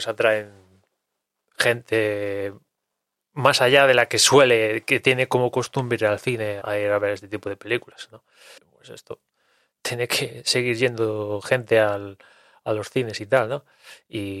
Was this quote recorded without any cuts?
no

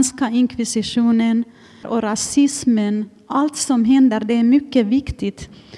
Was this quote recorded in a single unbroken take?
no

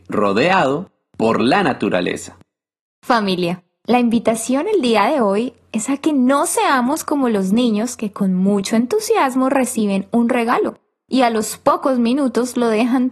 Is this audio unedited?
yes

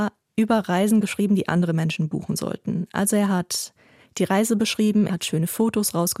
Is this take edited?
yes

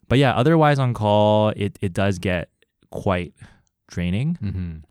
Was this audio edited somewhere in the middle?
no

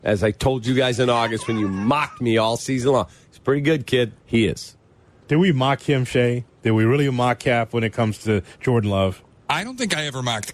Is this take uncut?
no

